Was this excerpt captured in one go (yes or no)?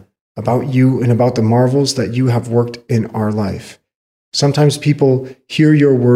no